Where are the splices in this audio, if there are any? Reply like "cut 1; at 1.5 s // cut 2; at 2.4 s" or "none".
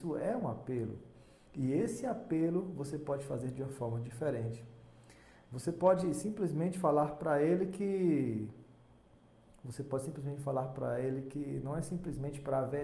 cut 1; at 1.5 s